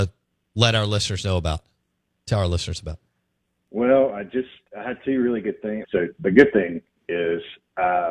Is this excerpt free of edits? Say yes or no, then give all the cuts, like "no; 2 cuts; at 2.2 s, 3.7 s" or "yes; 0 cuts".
no; 1 cut; at 5.8 s